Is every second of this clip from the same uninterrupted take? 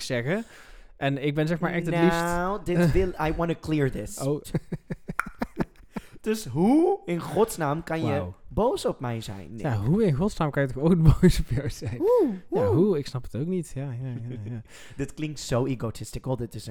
no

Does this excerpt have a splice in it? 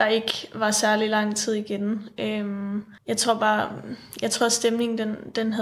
yes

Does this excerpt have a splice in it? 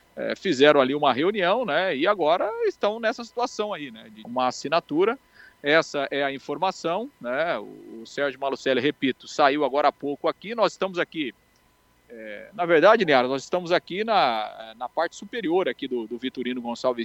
yes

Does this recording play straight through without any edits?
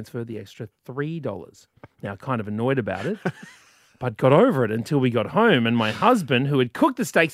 yes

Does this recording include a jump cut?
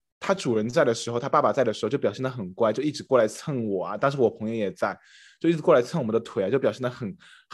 no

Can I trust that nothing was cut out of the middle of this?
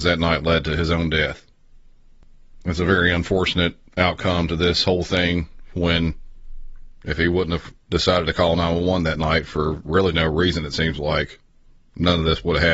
yes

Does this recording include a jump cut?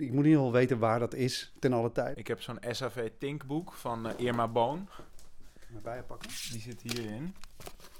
no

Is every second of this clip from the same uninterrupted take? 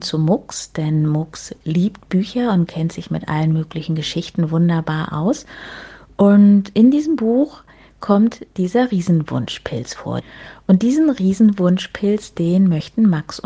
yes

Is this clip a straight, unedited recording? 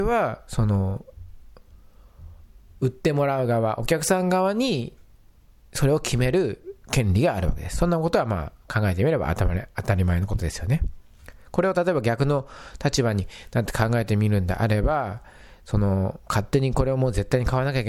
yes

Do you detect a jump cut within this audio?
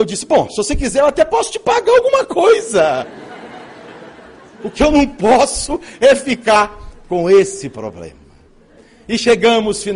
no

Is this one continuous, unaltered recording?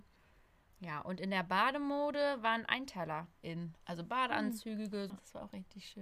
no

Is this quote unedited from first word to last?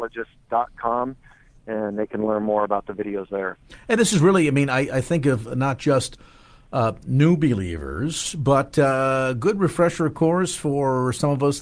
yes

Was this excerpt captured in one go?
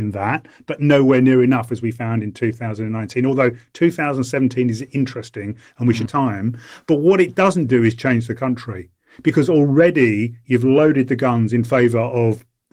no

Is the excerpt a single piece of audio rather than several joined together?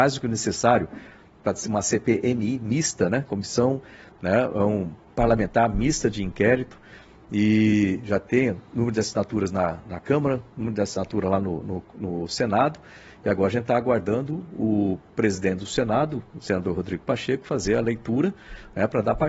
yes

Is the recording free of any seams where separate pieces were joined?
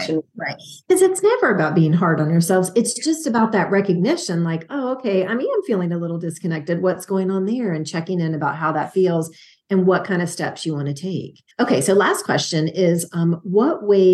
no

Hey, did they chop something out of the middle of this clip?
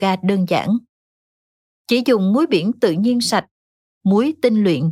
yes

